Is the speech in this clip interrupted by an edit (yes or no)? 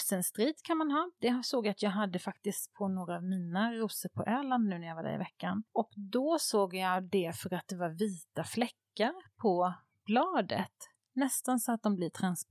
no